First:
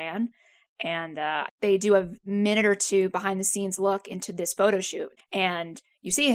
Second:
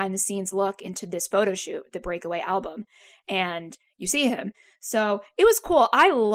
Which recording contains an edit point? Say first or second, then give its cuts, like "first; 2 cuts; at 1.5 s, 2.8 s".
first; 2 cuts; at 1.5 s, 5.2 s